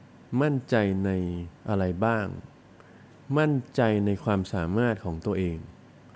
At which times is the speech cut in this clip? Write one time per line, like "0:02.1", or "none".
0:01.6